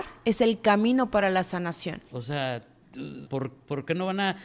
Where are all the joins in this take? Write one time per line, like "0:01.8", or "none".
0:02.1
0:03.2